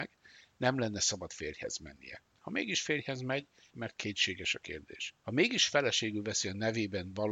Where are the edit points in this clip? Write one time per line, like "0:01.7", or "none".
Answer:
0:03.7
0:05.2